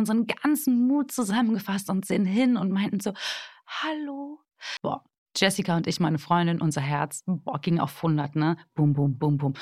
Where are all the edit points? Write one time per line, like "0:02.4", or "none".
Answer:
0:04.8